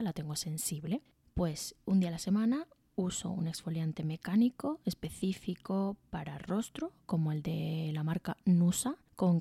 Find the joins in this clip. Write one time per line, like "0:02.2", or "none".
0:01.2

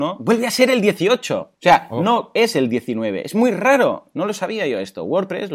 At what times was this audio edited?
0:01.6

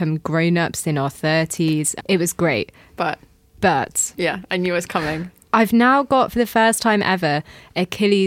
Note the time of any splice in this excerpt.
0:02.0

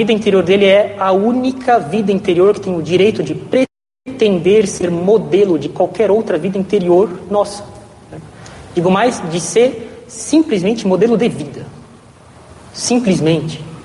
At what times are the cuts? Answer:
none

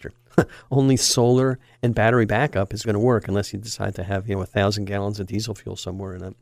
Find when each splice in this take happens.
0:02.8

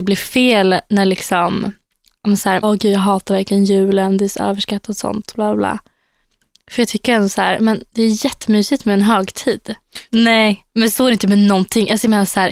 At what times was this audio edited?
0:02.6
0:10.1

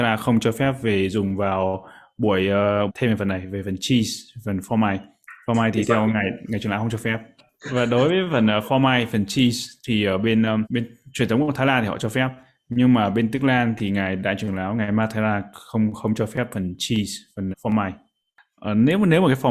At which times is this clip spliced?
0:02.9
0:10.6
0:17.5

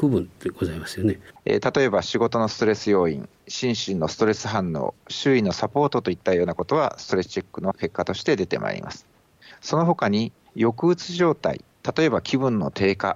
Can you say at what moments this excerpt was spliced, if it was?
0:01.4

